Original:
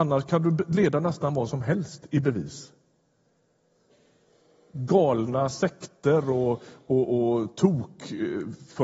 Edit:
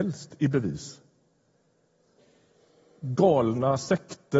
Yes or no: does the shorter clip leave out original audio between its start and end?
no